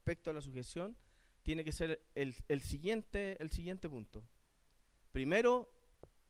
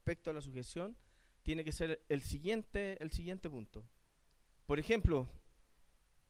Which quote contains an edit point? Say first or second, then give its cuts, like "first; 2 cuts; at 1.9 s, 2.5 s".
second; 2 cuts; at 2.1 s, 4.5 s